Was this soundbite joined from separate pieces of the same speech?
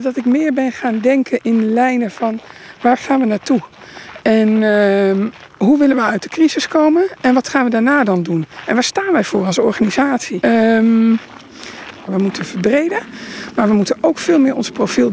yes; 2 cuts; at 10.4 s, 12.1 s

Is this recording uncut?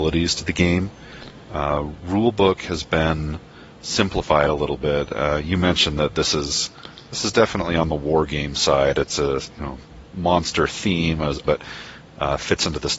no; 1 cut; at 11.5 s

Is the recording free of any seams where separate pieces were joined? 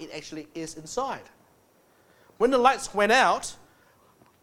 yes; 0 cuts

